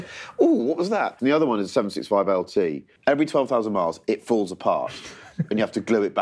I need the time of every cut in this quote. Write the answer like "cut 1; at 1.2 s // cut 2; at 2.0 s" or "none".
cut 1; at 3.0 s

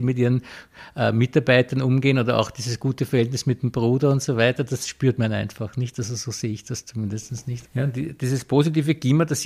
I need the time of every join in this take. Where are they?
cut 1; at 7.7 s

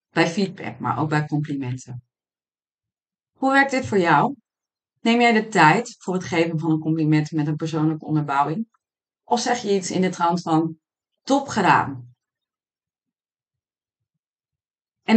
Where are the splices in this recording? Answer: none

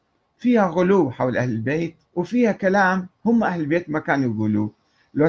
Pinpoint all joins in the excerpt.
cut 1; at 2.0 s

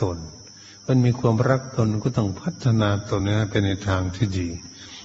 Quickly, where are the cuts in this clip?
cut 1; at 3.2 s

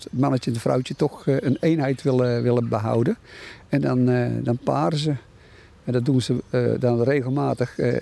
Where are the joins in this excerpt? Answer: none

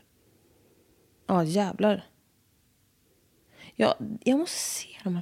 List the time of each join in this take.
none

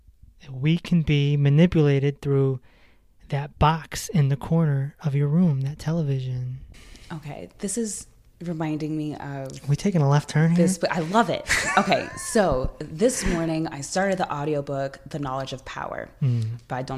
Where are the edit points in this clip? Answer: none

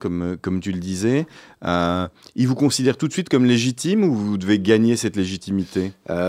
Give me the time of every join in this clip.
none

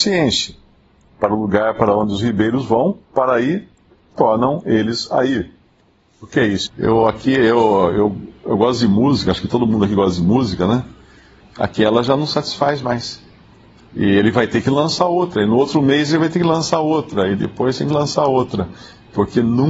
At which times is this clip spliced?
cut 1; at 3.0 s // cut 2; at 6.7 s // cut 3; at 11.4 s

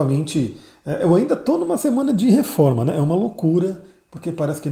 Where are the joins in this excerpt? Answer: none

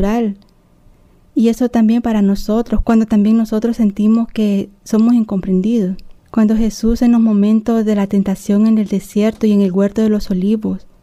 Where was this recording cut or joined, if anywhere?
cut 1; at 2.8 s // cut 2; at 6.2 s

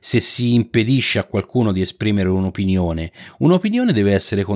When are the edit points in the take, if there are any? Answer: none

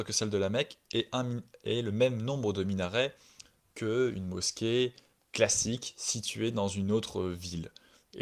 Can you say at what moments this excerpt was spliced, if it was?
cut 1; at 5.1 s

